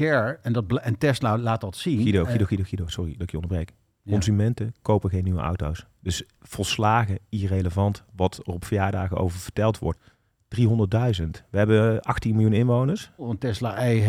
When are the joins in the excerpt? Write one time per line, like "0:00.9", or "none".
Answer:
0:09.9
0:13.2